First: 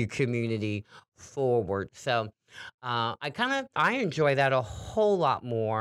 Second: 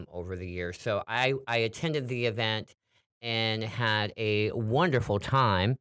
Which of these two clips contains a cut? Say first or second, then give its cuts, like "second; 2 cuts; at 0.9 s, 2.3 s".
first; 2 cuts; at 1.9 s, 3.8 s